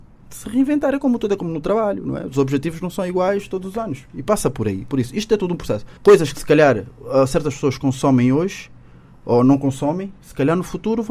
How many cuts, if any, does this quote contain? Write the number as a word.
one